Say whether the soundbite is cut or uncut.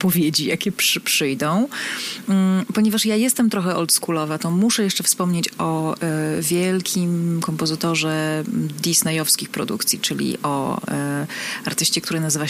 uncut